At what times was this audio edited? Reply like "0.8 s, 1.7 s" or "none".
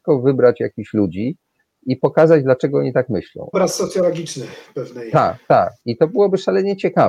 3.5 s